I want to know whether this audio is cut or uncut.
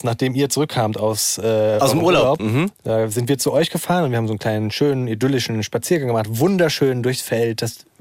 cut